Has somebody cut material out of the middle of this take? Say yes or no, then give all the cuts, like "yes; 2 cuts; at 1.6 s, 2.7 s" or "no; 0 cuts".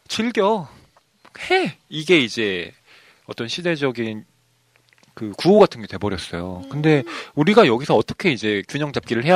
no; 0 cuts